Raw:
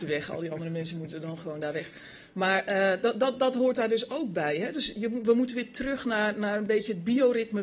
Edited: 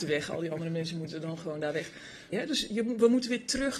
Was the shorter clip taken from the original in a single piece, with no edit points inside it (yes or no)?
no